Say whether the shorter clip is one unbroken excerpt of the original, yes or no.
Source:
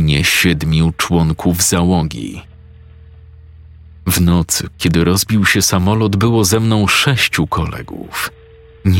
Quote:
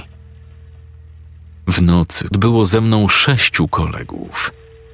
no